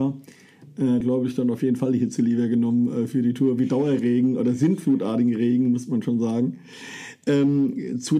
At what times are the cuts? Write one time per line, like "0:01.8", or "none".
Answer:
0:01.0